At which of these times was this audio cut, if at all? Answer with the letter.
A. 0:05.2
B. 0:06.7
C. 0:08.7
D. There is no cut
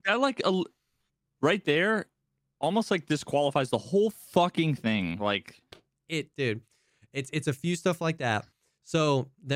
D